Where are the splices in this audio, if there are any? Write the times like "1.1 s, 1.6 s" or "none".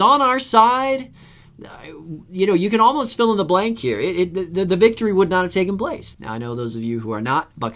6.1 s